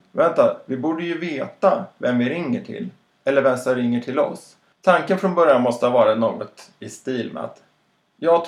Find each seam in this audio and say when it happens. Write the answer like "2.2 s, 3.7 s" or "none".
4.7 s